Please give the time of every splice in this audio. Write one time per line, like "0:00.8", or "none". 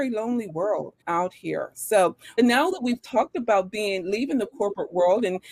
0:01.0
0:02.4